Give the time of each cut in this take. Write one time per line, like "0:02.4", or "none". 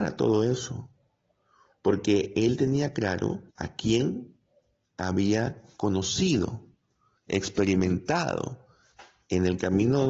0:03.5